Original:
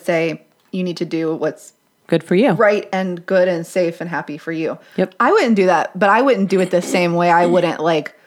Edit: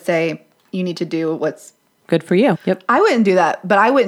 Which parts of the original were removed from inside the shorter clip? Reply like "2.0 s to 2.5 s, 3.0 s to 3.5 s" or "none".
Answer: 2.5 s to 4.8 s